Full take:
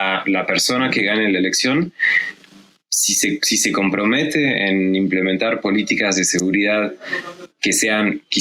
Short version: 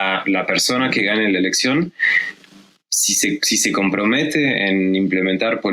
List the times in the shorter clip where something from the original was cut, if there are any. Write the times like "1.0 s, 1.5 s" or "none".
none